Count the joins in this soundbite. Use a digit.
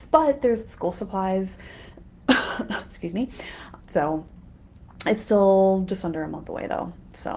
1